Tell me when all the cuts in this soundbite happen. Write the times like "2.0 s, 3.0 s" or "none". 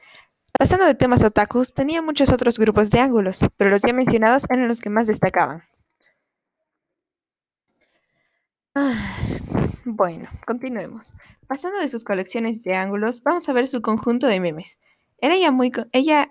none